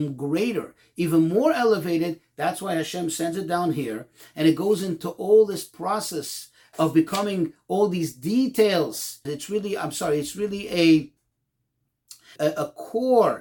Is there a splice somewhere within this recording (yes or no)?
yes